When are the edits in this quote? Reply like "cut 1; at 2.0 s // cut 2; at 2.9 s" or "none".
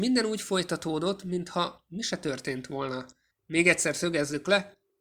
cut 1; at 3.4 s